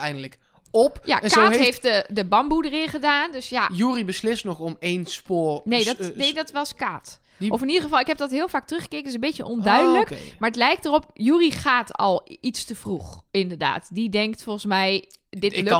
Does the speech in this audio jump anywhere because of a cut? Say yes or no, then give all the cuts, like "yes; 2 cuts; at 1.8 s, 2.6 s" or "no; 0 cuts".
no; 0 cuts